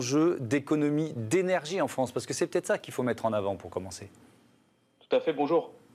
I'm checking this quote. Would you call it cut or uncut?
uncut